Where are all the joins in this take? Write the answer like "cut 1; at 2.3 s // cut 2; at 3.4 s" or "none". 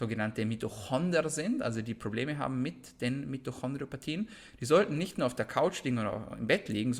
none